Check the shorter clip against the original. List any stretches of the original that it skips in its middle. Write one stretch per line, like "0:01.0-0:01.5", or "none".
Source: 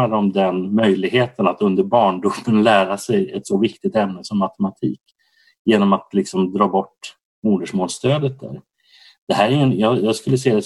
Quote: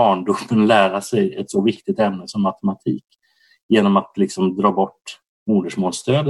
none